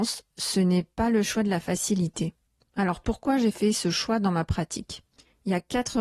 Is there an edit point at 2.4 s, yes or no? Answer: no